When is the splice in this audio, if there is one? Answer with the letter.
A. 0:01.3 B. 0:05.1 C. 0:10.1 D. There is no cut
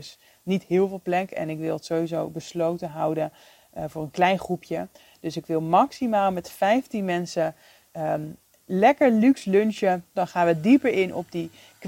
C